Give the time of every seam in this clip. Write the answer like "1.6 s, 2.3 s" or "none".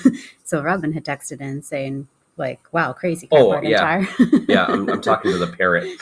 none

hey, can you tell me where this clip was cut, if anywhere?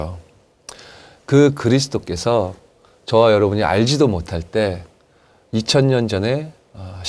none

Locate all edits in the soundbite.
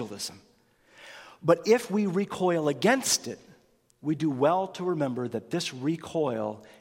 none

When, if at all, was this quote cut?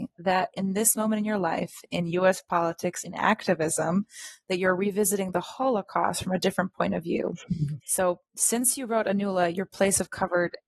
3.0 s, 7.8 s

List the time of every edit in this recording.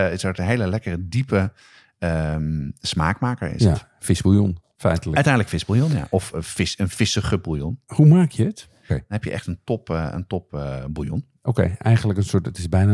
8.9 s

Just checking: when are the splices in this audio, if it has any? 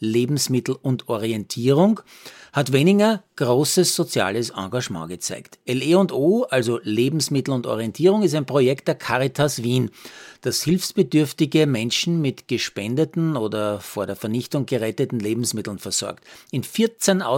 none

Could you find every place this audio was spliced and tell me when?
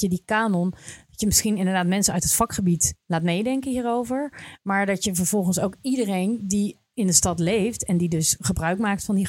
none

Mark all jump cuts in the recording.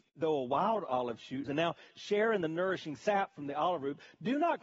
1.5 s

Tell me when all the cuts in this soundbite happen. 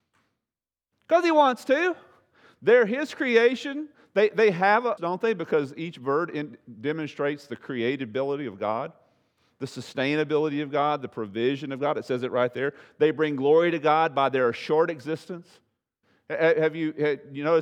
5.0 s

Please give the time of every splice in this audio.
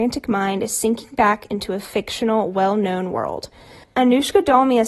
3.8 s

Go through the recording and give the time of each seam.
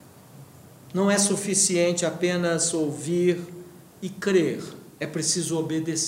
5.0 s

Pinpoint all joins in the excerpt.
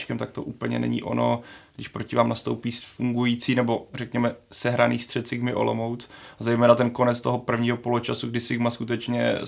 none

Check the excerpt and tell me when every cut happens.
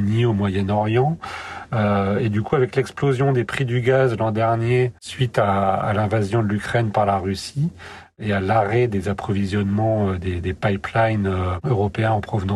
5.0 s

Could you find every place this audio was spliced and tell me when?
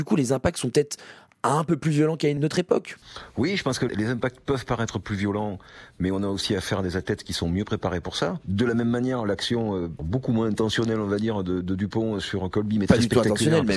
8.4 s

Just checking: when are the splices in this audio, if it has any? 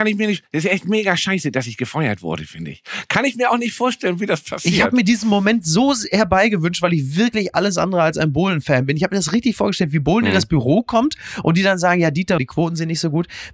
12.4 s

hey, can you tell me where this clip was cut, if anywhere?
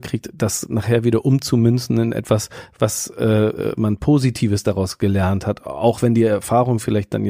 none

